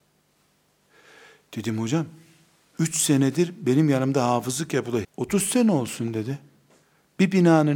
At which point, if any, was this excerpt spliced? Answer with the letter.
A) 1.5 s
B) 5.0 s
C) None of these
B